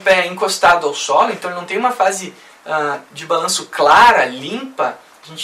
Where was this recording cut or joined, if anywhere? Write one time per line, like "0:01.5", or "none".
none